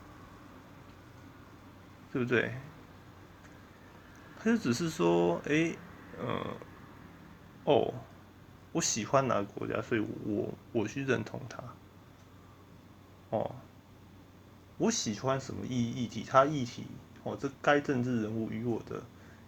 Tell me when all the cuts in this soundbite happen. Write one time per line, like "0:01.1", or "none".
none